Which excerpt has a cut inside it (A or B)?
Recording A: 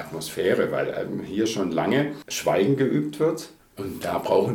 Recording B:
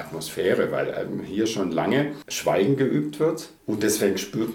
A